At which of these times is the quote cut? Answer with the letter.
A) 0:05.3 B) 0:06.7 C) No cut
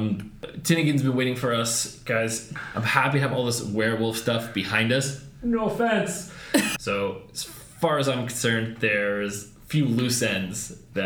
B